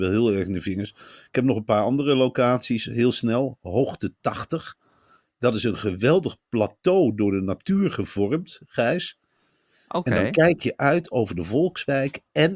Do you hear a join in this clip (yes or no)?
no